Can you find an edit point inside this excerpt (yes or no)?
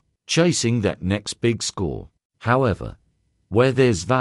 no